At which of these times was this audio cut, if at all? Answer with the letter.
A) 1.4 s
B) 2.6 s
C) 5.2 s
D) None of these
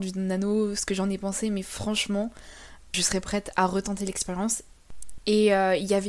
C